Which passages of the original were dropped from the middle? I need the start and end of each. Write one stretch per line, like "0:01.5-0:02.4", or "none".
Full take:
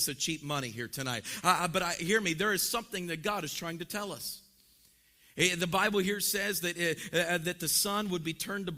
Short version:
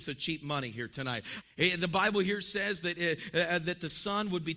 0:01.4-0:05.2